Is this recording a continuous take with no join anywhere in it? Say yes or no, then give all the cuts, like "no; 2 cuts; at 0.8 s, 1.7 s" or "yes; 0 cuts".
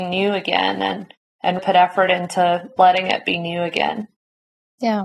no; 1 cut; at 1.6 s